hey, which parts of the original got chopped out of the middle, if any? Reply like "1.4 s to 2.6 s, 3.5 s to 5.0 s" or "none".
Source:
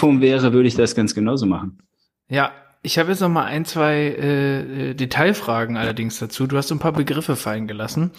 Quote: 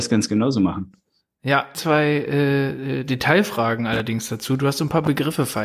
2.6 s to 3.7 s